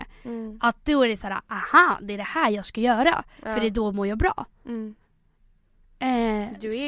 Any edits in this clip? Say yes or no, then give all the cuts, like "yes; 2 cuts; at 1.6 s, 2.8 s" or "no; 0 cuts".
no; 0 cuts